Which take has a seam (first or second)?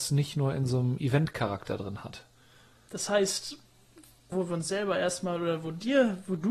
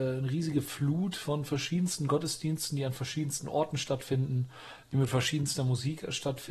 first